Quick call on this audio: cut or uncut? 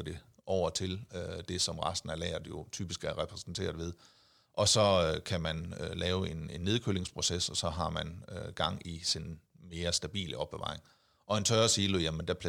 uncut